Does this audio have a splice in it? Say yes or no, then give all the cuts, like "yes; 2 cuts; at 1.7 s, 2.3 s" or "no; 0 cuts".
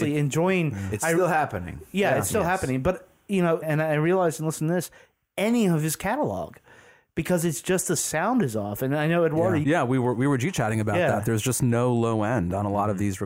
yes; 2 cuts; at 3.6 s, 9.6 s